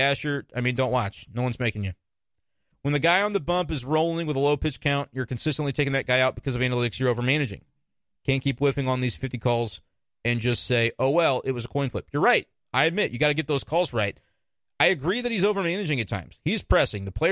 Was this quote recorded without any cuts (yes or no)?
no